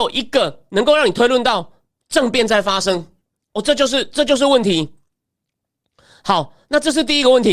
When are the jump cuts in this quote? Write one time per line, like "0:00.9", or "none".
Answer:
none